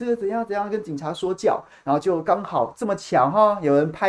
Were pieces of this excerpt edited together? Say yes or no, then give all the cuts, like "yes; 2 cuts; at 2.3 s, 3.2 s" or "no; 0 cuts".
no; 0 cuts